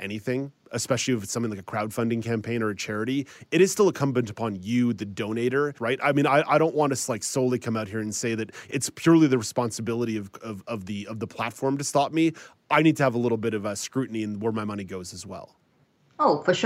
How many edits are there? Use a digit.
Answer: 1